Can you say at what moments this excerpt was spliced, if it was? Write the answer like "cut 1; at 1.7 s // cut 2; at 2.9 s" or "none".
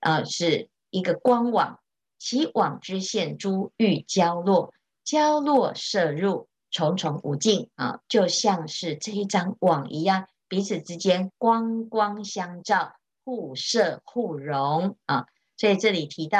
cut 1; at 8.0 s

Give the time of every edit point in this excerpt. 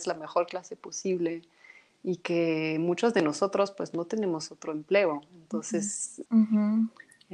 cut 1; at 6.3 s

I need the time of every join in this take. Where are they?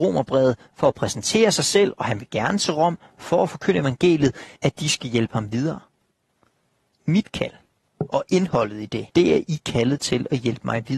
cut 1; at 4.6 s // cut 2; at 7.9 s // cut 3; at 9.1 s

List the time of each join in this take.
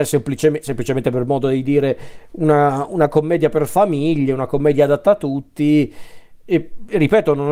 none

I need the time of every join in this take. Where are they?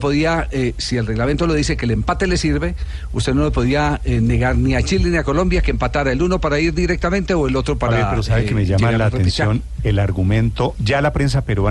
none

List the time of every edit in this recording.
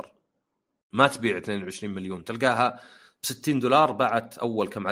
none

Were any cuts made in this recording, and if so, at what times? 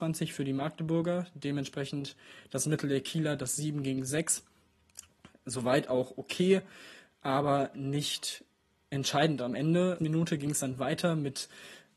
cut 1; at 10.0 s

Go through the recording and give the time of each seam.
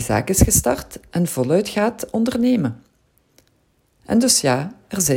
cut 1; at 4.0 s

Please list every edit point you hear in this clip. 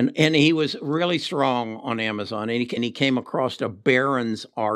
cut 1; at 2.8 s

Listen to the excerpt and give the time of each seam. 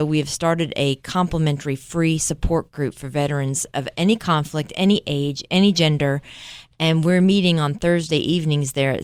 none

